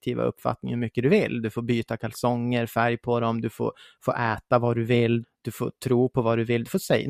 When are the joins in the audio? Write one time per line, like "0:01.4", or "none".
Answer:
0:05.2